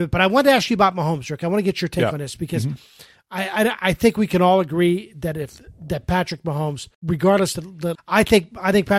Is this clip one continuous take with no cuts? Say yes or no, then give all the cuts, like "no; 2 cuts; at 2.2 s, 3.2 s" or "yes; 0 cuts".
no; 2 cuts; at 6.9 s, 7.9 s